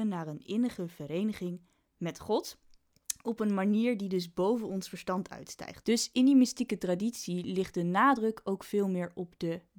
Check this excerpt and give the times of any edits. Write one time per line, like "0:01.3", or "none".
0:05.8